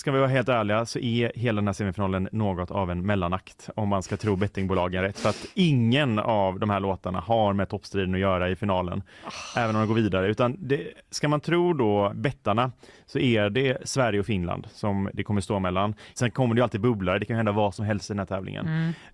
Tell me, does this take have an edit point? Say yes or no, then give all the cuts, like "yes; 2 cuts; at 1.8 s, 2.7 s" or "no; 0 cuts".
yes; 2 cuts; at 12.1 s, 16.2 s